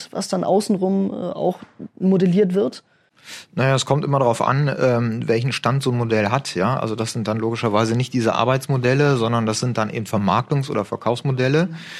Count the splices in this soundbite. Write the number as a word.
zero